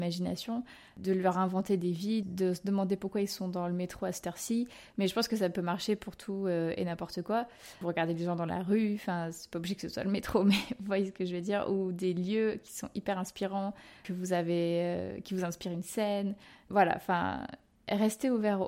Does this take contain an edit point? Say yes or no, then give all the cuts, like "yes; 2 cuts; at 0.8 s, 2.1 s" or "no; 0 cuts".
yes; 1 cut; at 2.2 s